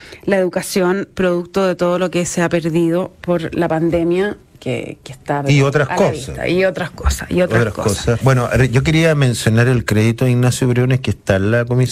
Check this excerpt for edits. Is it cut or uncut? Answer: cut